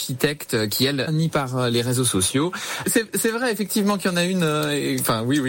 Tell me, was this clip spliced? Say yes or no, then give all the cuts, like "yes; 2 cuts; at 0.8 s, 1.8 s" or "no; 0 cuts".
yes; 2 cuts; at 1.1 s, 2.8 s